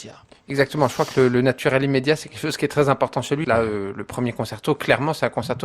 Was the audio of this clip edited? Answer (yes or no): yes